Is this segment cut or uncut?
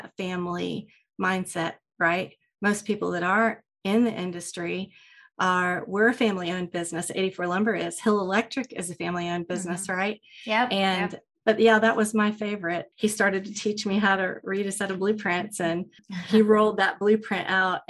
cut